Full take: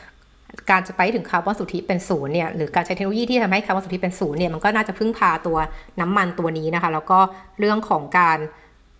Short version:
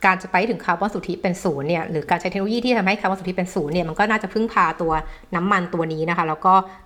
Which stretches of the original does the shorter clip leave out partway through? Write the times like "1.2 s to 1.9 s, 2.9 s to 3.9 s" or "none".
none